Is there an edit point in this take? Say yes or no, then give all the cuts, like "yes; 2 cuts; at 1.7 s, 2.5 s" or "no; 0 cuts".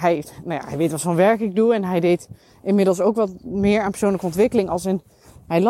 no; 0 cuts